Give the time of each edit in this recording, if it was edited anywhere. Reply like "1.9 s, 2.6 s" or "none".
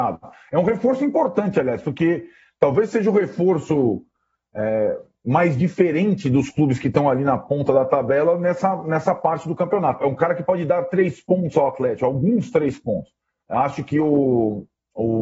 10.0 s, 13.4 s